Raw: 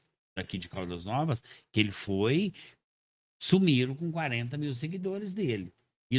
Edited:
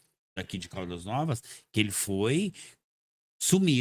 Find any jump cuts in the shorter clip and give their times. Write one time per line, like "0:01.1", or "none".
none